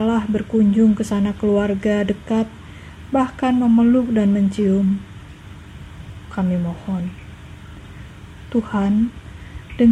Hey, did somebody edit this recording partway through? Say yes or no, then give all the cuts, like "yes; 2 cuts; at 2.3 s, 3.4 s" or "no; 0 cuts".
yes; 2 cuts; at 3.1 s, 6.0 s